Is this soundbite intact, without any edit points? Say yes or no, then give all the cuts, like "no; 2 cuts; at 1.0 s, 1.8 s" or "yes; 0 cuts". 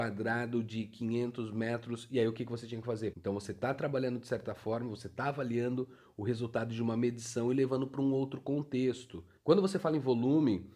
no; 2 cuts; at 3.1 s, 9.4 s